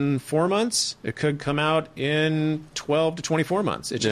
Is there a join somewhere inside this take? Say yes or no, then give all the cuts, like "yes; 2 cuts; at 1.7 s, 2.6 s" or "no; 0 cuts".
no; 0 cuts